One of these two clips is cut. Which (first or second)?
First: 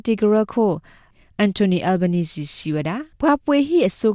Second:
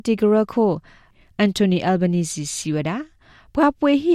first